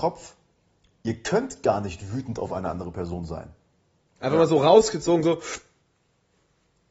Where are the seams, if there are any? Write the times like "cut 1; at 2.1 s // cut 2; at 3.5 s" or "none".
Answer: cut 1; at 4.2 s